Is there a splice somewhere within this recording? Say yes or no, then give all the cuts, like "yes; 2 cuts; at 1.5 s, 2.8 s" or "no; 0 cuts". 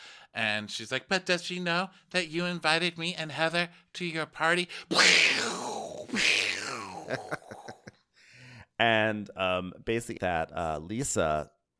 yes; 1 cut; at 10.2 s